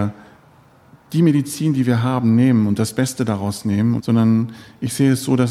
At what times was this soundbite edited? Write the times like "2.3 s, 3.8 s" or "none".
4.0 s

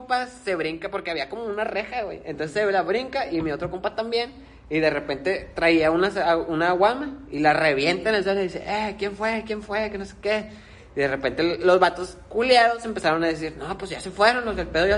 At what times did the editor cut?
none

